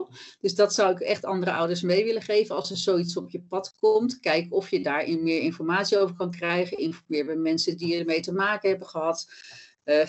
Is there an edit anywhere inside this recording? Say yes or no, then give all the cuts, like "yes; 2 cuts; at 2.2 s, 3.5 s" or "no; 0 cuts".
no; 0 cuts